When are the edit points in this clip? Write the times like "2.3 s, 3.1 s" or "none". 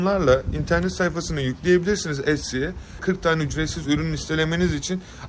3.0 s